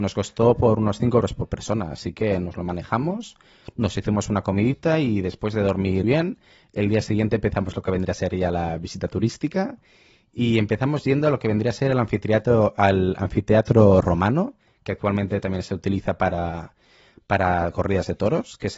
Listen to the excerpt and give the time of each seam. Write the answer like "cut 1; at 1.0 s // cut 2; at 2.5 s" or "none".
cut 1; at 6.0 s